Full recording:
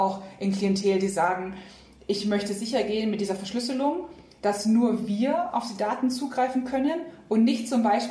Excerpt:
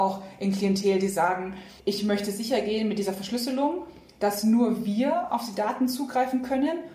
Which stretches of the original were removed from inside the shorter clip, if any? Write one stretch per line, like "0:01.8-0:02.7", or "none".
0:01.8-0:02.0